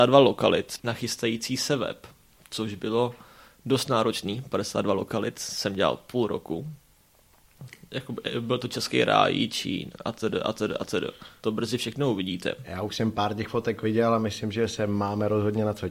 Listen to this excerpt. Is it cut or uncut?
uncut